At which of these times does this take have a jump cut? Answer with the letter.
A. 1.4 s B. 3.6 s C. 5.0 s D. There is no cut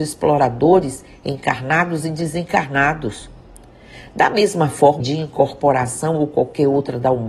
C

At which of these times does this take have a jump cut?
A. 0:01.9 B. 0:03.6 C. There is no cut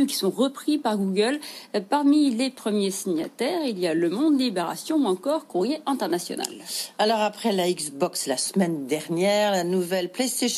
C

